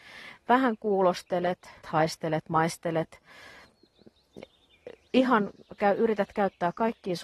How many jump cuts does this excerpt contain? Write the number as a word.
one